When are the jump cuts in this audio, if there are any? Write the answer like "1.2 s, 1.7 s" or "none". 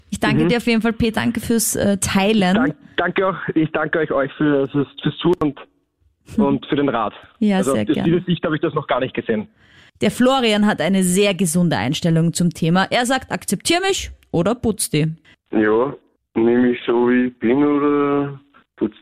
1.1 s